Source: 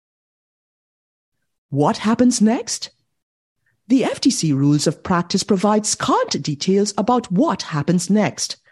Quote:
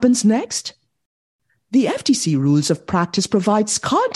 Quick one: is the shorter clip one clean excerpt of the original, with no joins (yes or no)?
yes